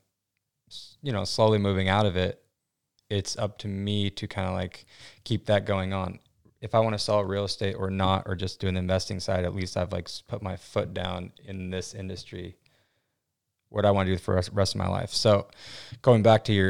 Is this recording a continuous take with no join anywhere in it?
yes; 0 cuts

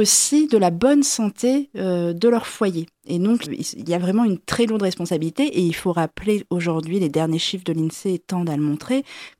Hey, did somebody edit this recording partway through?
yes; 1 cut; at 3.5 s

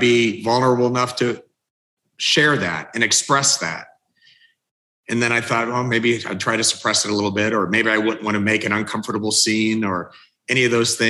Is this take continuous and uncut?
yes; 0 cuts

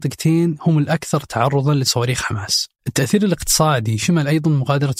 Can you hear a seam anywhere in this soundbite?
yes; 1 cut; at 2.8 s

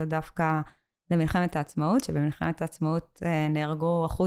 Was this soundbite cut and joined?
no; 0 cuts

